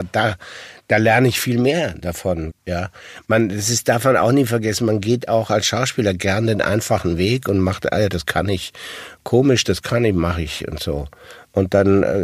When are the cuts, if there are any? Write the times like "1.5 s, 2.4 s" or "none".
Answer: 2.5 s